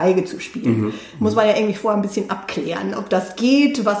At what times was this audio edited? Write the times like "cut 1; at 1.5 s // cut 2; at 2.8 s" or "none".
none